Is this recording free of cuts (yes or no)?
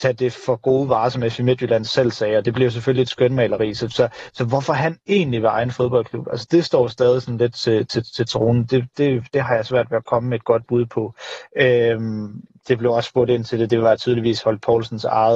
yes